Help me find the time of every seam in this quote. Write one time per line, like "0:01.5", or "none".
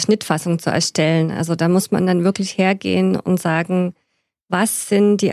none